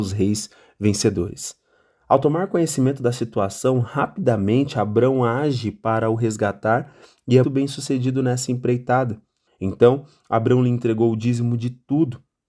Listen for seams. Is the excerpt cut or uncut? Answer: cut